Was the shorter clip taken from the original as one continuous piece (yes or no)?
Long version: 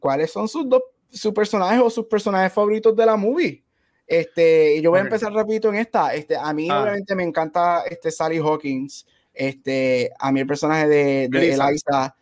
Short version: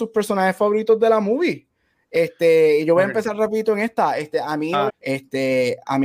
no